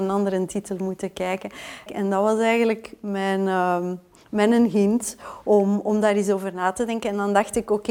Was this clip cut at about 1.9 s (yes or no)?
yes